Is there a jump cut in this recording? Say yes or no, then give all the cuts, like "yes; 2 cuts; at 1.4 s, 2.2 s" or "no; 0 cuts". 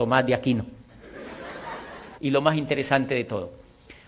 yes; 1 cut; at 2.1 s